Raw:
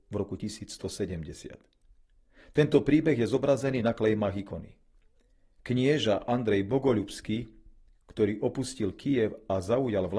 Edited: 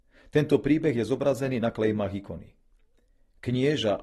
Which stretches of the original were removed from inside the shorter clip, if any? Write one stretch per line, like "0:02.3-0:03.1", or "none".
none